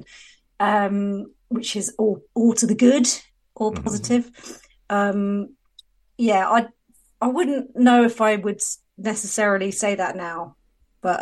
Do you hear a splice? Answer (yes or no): yes